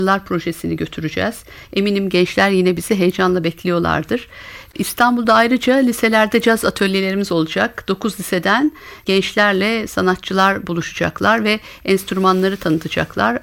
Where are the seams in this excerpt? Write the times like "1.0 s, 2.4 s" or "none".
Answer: none